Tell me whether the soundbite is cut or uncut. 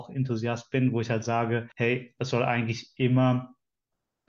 cut